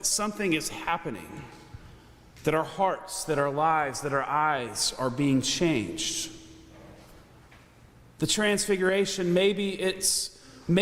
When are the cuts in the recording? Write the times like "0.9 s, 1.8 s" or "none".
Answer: none